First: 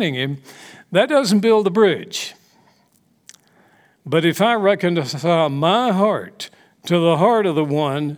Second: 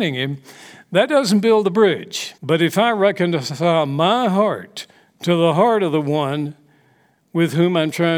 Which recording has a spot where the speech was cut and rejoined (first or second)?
second